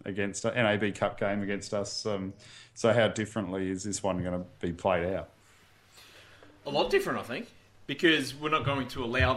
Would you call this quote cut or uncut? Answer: uncut